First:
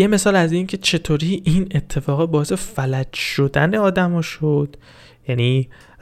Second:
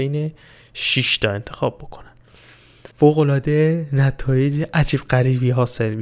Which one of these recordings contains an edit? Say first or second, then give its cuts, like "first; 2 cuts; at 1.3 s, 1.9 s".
second; 1 cut; at 2.9 s